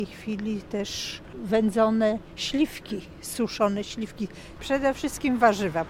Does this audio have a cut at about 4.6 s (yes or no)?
yes